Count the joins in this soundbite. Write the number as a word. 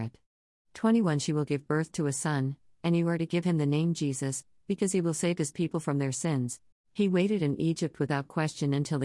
one